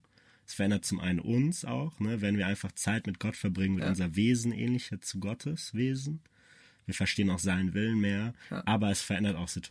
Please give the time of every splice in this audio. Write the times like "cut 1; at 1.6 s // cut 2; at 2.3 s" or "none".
none